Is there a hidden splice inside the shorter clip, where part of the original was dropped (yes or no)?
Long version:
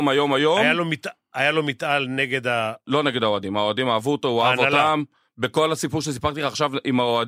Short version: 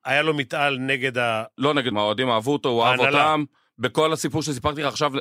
yes